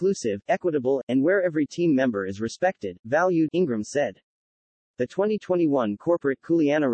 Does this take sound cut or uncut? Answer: cut